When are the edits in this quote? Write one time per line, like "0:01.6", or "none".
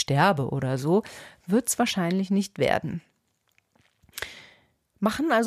none